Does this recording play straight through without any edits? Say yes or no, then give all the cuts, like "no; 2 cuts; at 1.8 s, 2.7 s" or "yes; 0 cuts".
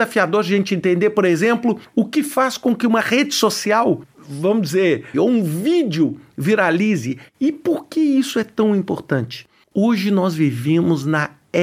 no; 2 cuts; at 5.1 s, 7.3 s